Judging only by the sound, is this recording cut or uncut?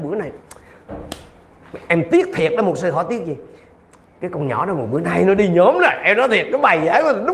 uncut